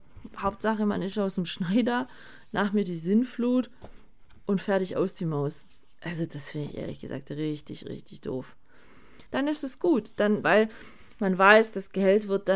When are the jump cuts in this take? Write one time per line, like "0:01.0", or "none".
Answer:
0:09.3
0:10.4